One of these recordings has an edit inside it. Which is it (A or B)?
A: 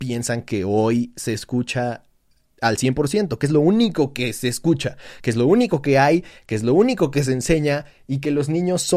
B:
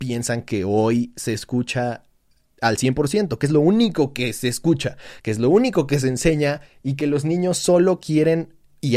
B